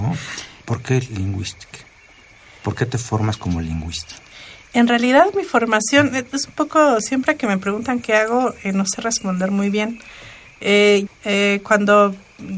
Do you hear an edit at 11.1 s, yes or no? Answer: yes